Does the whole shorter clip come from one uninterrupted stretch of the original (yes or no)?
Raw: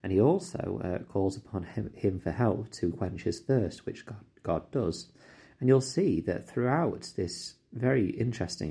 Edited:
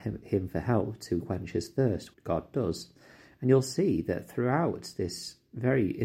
no